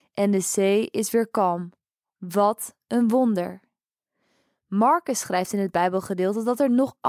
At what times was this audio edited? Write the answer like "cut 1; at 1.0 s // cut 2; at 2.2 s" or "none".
none